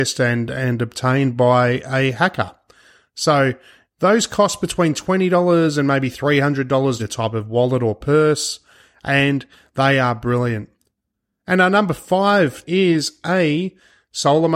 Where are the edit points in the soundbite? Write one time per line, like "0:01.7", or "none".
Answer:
0:07.0